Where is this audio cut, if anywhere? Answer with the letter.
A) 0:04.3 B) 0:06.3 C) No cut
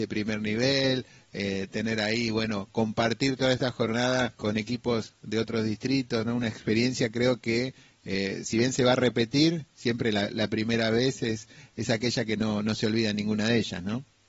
A